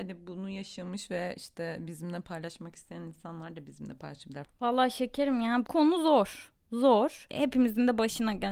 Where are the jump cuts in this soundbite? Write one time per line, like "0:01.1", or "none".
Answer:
0:04.4

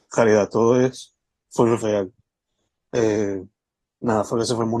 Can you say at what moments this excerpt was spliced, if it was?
0:01.8

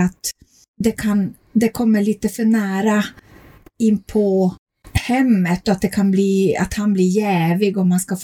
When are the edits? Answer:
none

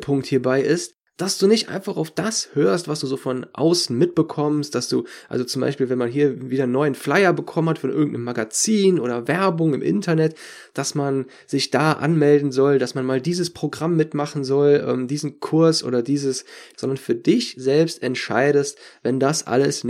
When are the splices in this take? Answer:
0:16.7

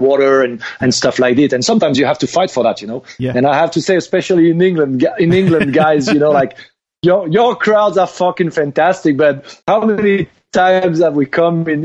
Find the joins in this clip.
0:09.6

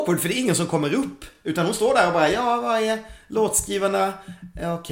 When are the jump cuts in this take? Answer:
none

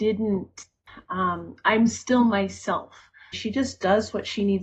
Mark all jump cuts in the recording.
0:03.3

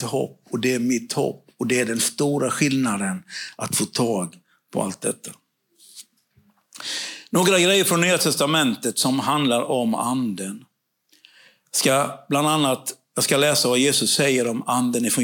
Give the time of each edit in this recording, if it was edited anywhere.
none

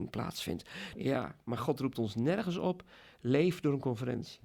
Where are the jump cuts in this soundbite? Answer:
0:01.0

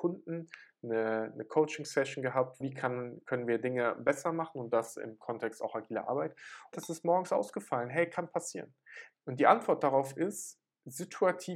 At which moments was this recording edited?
0:02.6
0:06.7
0:09.1

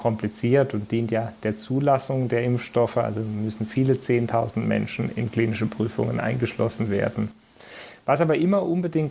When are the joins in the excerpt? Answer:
none

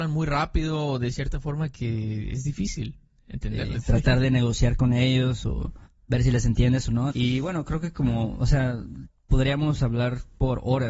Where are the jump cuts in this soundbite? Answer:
0:03.8
0:07.1

